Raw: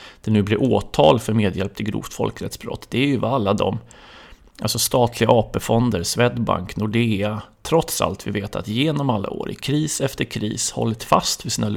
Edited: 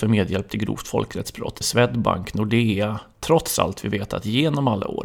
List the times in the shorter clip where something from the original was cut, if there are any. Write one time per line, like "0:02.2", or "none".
0:01.6